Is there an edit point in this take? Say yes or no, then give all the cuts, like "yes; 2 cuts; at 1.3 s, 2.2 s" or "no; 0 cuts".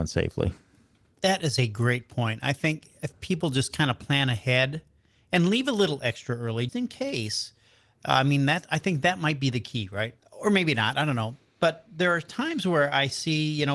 yes; 2 cuts; at 6.7 s, 10.2 s